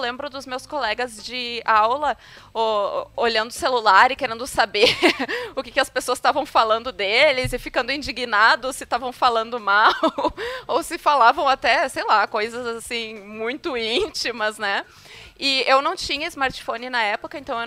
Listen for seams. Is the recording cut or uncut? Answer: uncut